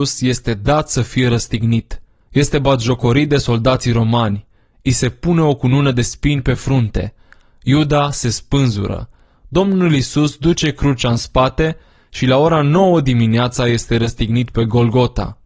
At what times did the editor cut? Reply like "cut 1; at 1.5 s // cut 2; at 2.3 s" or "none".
none